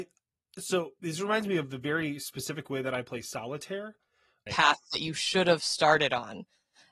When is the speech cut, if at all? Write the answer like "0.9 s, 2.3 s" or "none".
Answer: 4.5 s